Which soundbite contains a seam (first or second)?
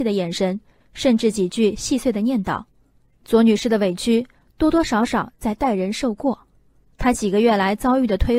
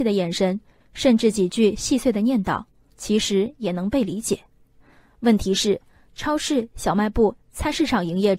second